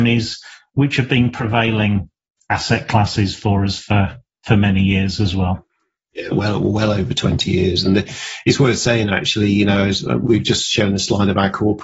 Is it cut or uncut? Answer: cut